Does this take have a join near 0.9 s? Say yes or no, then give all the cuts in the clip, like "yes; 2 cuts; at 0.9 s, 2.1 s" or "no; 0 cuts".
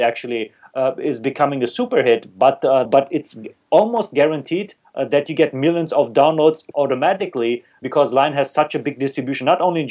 no; 2 cuts; at 2.9 s, 6.7 s